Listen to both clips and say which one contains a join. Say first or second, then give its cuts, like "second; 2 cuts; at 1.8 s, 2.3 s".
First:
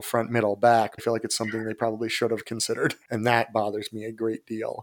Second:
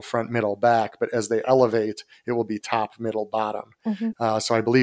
first; 2 cuts; at 1.0 s, 3.1 s